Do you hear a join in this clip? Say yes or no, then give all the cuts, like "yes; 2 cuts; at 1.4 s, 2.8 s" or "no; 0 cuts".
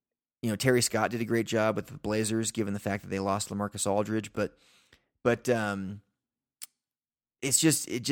no; 0 cuts